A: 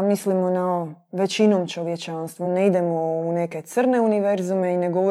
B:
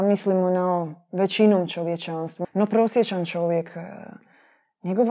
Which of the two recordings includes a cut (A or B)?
B